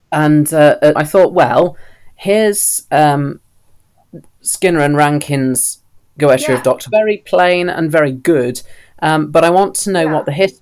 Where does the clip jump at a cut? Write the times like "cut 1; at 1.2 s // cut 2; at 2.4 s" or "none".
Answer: cut 1; at 0.9 s // cut 2; at 6.9 s

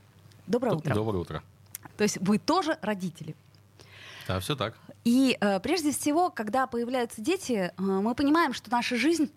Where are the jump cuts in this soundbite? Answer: cut 1; at 1.9 s

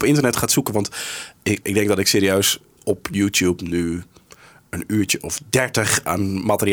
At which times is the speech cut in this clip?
cut 1; at 1.6 s

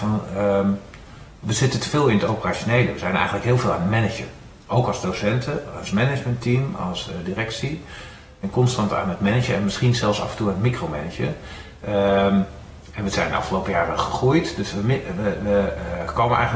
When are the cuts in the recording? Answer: none

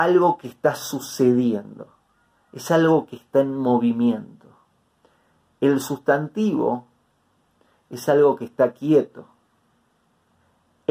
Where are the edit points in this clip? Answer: none

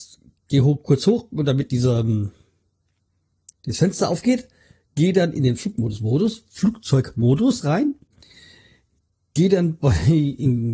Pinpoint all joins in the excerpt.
cut 1; at 3.5 s

